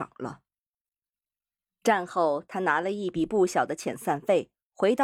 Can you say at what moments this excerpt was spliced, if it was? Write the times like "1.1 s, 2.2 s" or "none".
none

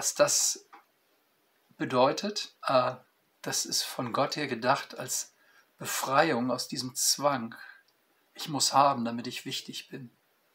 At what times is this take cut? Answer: 2.6 s

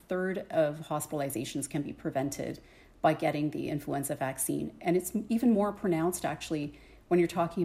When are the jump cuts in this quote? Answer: none

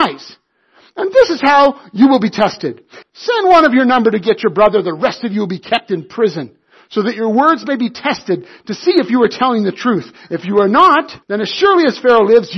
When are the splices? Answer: 3.0 s, 11.2 s

